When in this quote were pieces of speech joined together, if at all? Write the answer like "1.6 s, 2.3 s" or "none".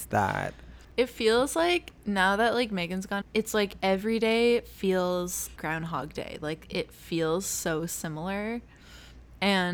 3.2 s, 5.6 s